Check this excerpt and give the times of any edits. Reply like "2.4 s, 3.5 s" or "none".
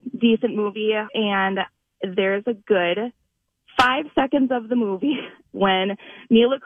1.1 s